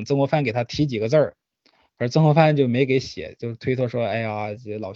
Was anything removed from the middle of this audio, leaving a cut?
no; 0 cuts

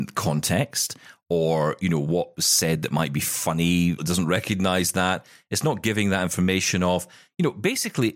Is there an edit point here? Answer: yes; 1 cut; at 4.0 s

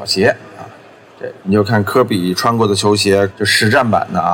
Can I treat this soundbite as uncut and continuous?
no; 2 cuts; at 1.4 s, 3.3 s

